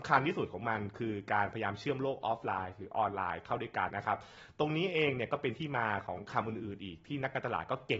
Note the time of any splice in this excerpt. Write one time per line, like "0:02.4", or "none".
0:03.9